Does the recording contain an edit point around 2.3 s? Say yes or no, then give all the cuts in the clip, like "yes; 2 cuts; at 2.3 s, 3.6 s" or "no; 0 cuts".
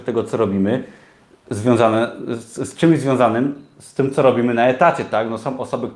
no; 0 cuts